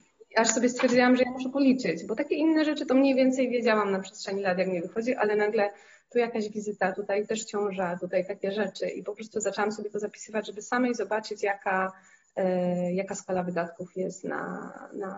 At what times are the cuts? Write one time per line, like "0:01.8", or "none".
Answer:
none